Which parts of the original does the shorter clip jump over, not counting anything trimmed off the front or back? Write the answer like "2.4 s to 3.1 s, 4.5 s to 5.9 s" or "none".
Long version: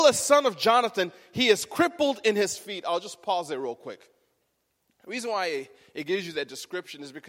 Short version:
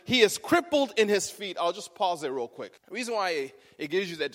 4.0 s to 4.9 s

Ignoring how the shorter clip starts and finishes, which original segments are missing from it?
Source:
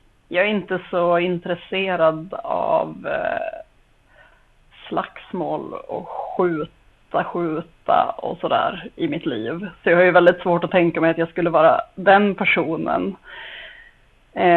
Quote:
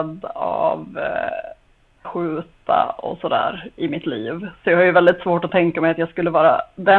4.1 s to 7.2 s

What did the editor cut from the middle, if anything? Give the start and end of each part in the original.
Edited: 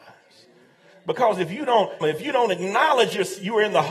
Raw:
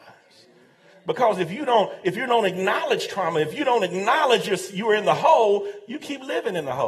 2.0 s to 3.3 s

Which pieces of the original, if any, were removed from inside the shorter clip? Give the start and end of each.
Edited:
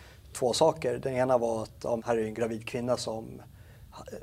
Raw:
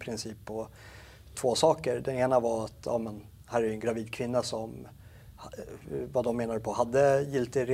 3.0 s to 3.4 s

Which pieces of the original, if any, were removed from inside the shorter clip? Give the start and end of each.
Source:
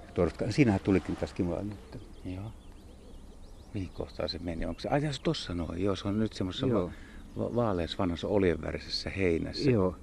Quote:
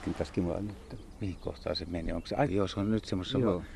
2.1 s to 3.7 s, 5.0 s to 5.7 s

